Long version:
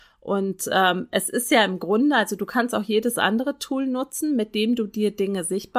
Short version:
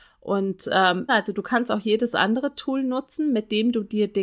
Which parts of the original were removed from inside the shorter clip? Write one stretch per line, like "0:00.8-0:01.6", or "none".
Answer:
0:01.1-0:02.1